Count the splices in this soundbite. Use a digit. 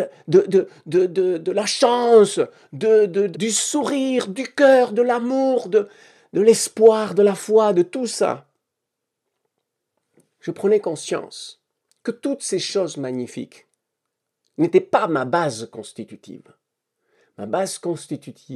1